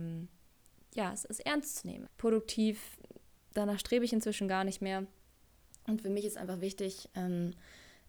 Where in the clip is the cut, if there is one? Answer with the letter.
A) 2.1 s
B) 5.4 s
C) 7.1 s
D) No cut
A